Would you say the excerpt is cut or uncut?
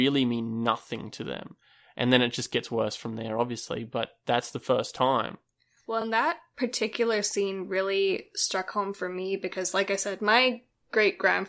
uncut